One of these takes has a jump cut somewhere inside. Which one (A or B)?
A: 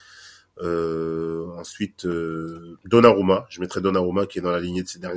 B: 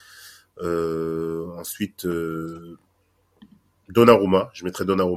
A